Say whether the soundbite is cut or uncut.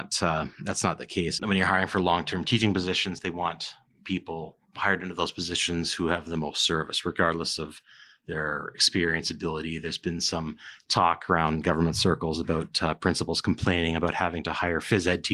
cut